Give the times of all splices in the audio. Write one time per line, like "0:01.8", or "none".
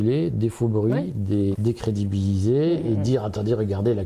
0:01.5